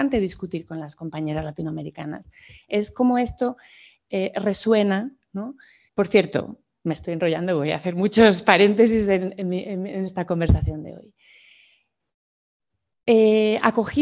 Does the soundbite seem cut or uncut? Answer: cut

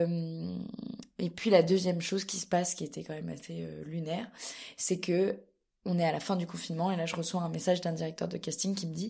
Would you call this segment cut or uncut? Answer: uncut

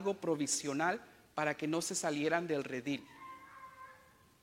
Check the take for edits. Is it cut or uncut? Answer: uncut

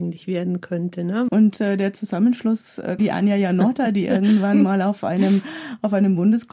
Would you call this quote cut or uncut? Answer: cut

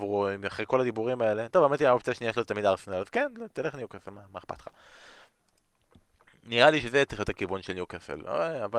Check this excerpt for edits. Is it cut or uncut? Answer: uncut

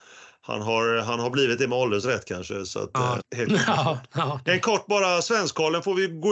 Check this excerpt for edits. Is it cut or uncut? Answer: cut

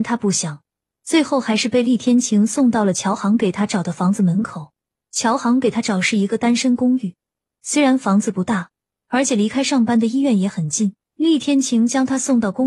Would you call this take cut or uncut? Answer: cut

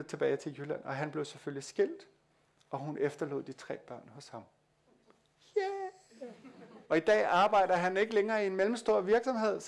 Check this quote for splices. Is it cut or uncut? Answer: cut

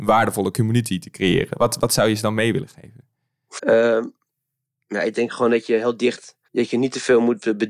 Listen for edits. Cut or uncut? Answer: cut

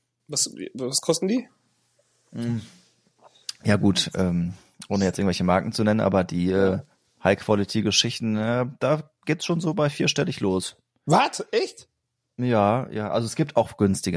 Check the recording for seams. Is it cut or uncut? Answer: uncut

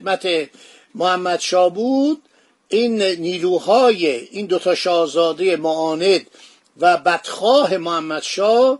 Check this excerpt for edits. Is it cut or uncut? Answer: uncut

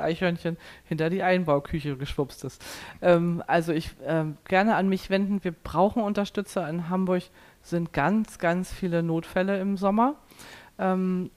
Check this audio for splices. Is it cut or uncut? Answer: uncut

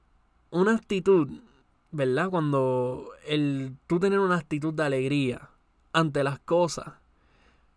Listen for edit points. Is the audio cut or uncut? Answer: uncut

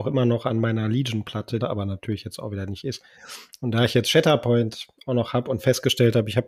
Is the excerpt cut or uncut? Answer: cut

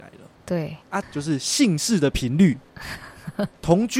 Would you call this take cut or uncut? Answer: cut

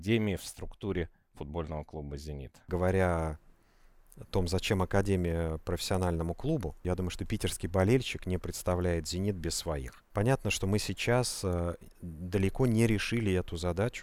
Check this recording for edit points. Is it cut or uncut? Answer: uncut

